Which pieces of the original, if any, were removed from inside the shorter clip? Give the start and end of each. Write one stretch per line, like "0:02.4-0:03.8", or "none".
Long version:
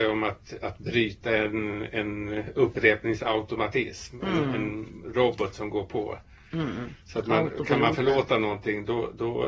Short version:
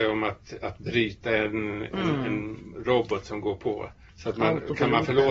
0:01.9-0:04.2
0:06.4-0:07.0